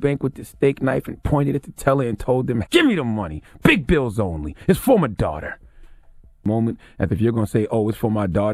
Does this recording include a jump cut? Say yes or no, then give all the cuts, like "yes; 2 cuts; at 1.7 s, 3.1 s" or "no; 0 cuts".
yes; 1 cut; at 2.7 s